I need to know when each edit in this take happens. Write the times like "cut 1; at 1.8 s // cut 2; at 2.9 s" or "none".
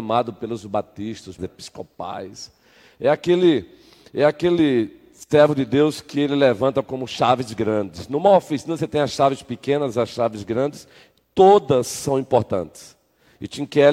cut 1; at 1.4 s